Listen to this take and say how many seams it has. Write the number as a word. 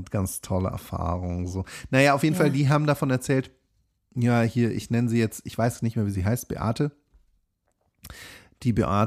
zero